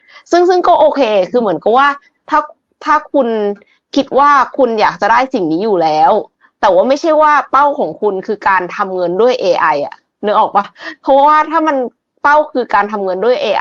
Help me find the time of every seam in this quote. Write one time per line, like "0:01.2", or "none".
none